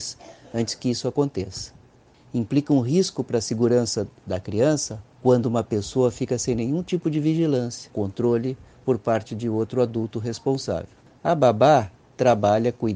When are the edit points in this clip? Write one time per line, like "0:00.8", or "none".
0:07.9
0:11.2